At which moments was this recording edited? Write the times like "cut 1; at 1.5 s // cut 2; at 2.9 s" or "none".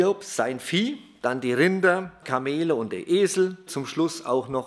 cut 1; at 2.2 s // cut 2; at 3.7 s

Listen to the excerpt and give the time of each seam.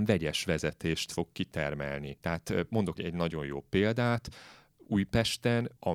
cut 1; at 3.0 s

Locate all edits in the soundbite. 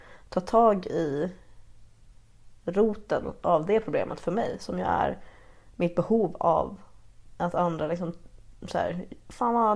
none

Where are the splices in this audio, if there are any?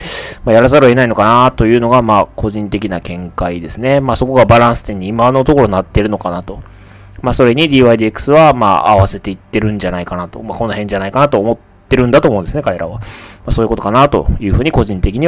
none

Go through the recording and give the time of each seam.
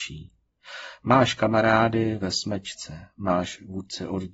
none

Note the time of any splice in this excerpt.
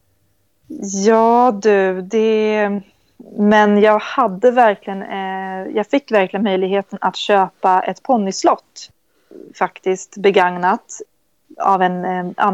cut 1; at 3.2 s

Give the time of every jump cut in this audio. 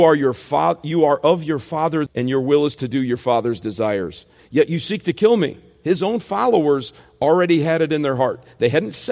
cut 1; at 2.1 s // cut 2; at 4.4 s

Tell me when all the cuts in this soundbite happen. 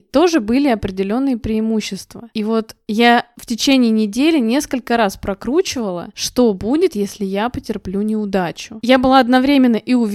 none

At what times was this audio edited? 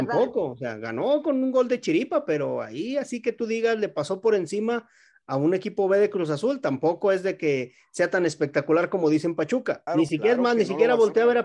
cut 1; at 9.9 s

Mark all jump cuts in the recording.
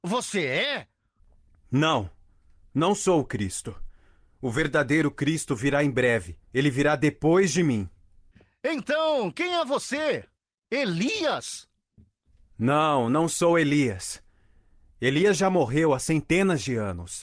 cut 1; at 6.4 s

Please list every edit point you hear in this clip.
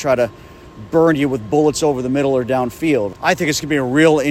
cut 1; at 3.1 s

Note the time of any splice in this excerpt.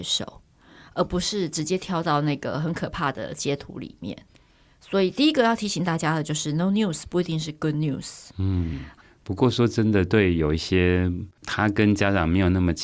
none

